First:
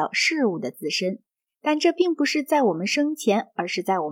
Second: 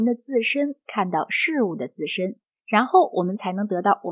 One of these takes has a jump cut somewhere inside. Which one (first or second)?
first